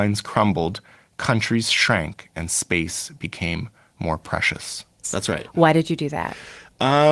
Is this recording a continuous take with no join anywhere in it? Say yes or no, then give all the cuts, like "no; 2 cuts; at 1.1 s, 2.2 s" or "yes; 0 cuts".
no; 1 cut; at 5.0 s